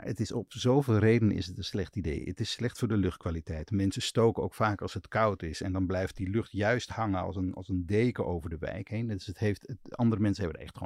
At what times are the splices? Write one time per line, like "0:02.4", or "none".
none

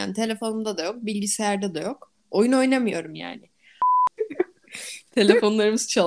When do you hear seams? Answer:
0:04.2

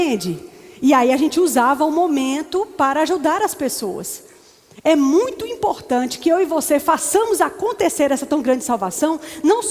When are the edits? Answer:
none

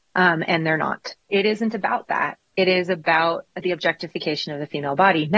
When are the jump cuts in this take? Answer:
0:01.3
0:02.5

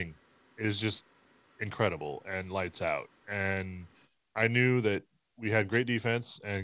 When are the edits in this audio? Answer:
none

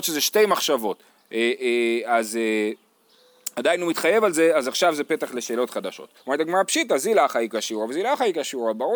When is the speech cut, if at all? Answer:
0:06.2

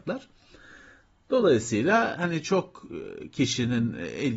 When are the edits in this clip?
none

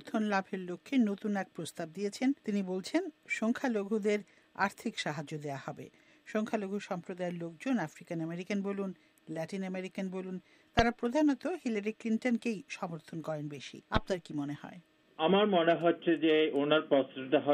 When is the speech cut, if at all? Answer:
0:02.4
0:13.9

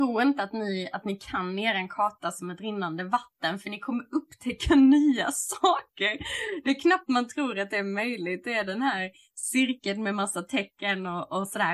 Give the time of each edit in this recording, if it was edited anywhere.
none

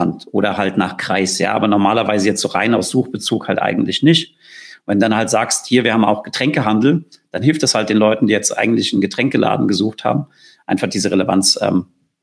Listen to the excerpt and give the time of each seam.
0:04.7

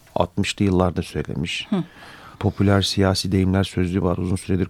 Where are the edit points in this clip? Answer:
0:02.3

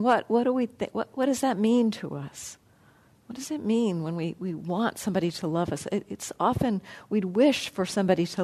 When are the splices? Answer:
0:01.1

